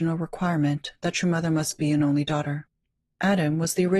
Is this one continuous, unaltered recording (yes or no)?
yes